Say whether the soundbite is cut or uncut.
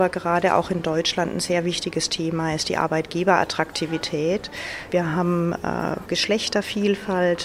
cut